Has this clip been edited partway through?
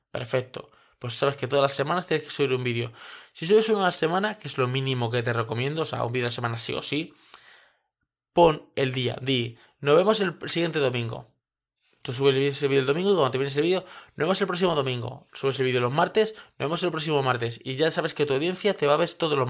no; 0 cuts

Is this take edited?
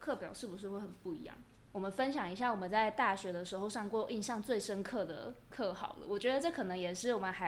yes; 1 cut; at 1.7 s

